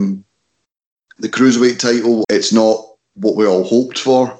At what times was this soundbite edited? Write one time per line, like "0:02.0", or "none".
0:02.2